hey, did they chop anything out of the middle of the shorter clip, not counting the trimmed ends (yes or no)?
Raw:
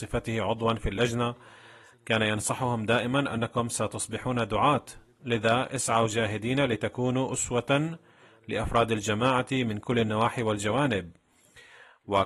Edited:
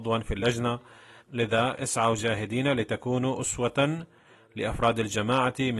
yes